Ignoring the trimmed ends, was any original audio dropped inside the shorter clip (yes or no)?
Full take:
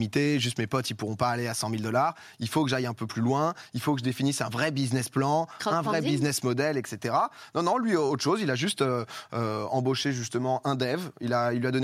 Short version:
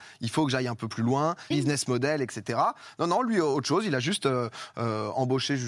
yes